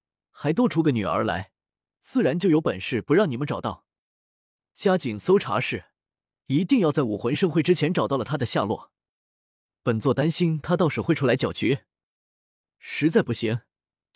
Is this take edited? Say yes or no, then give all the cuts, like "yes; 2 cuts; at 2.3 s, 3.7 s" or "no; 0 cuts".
no; 0 cuts